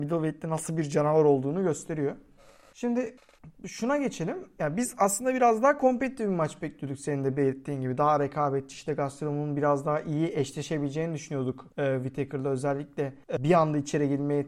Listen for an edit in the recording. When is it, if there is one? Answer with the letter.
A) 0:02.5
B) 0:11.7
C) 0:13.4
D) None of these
C